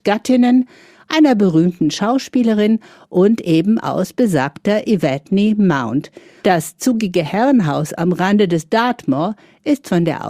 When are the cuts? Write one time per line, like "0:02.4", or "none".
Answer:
0:00.9
0:06.4